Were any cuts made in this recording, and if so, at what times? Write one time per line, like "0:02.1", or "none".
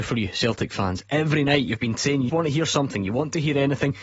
0:02.3